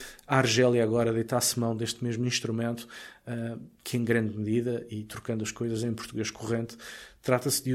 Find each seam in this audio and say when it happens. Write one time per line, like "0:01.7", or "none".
0:04.9